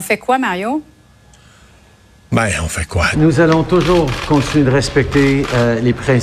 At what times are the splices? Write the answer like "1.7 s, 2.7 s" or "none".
3.1 s